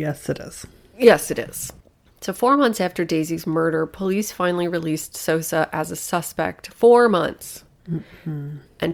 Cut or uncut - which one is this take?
uncut